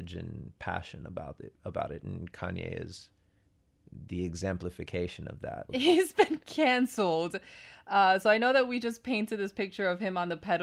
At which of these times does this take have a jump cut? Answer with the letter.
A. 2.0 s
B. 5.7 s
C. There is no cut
B